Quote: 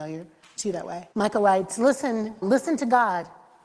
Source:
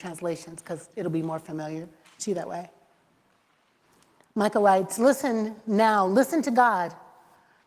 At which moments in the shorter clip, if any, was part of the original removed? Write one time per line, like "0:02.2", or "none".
0:01.1
0:02.4